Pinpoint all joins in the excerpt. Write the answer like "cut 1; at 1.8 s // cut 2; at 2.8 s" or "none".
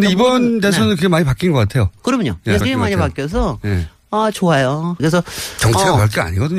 cut 1; at 2.6 s // cut 2; at 5.0 s